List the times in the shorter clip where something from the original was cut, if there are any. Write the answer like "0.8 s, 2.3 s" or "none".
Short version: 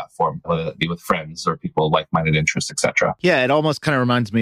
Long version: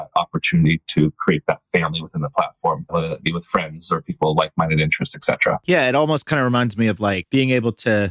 none